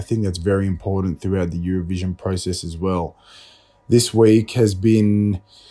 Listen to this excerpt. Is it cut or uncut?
uncut